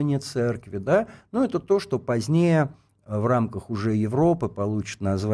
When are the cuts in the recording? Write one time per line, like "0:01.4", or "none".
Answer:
none